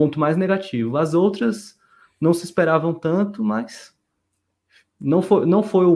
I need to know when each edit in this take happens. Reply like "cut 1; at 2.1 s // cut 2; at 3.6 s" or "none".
none